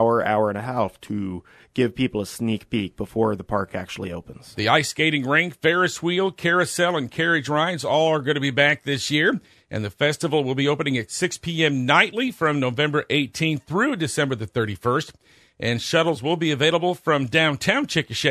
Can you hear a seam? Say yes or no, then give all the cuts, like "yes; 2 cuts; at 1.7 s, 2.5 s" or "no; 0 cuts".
no; 0 cuts